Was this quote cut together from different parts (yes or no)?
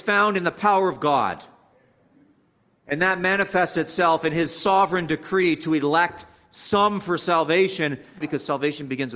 yes